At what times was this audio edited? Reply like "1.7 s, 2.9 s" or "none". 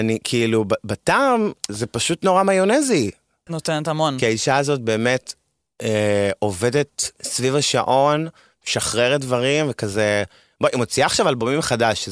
3.5 s